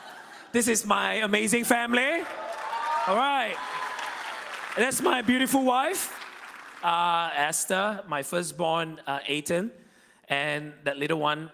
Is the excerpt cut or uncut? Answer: uncut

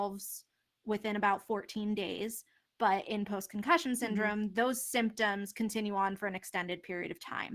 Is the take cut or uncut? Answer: uncut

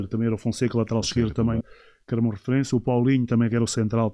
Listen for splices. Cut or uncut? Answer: cut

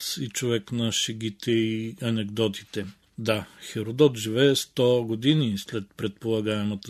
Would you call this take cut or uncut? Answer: uncut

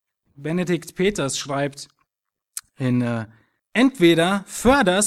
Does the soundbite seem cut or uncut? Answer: cut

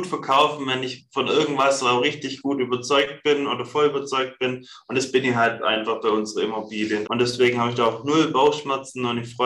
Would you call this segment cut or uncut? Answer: cut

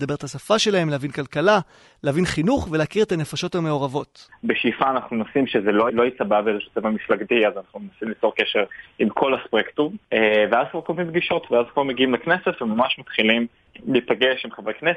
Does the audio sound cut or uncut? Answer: cut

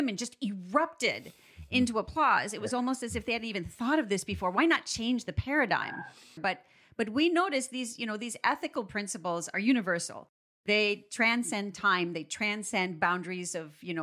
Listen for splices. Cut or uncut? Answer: cut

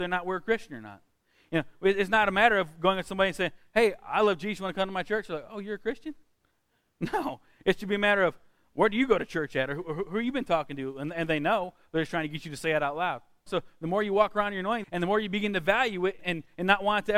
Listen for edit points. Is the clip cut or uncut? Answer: cut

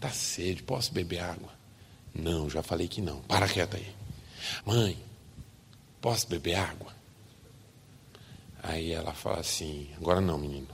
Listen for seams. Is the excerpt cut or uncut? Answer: cut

